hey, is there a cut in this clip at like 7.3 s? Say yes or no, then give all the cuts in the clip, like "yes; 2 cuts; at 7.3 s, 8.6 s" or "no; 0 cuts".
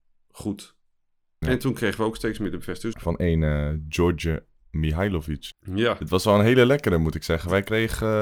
no; 3 cuts; at 1.4 s, 2.9 s, 5.5 s